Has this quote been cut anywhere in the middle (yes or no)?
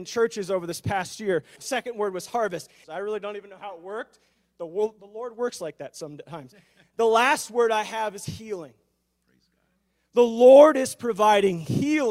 yes